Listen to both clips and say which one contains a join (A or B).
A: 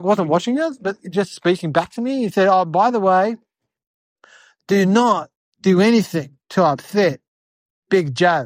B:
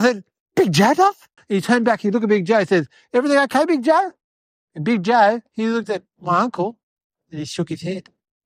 B